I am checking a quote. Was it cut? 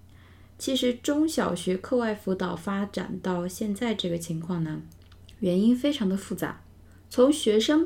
no; 0 cuts

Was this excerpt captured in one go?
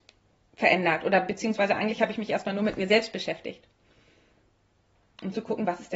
yes; 0 cuts

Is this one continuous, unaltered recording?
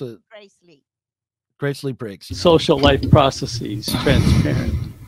no; 1 cut; at 2.3 s

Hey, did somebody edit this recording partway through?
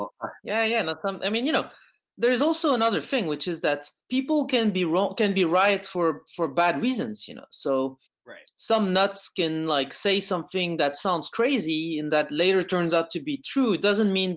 no; 0 cuts

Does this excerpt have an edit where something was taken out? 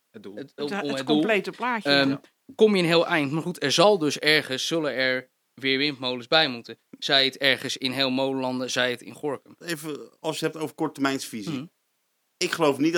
yes; 1 cut; at 9.6 s

